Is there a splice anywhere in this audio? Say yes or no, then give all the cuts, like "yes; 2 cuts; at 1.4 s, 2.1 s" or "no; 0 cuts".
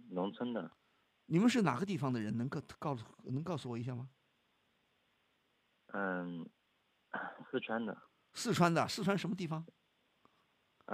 no; 0 cuts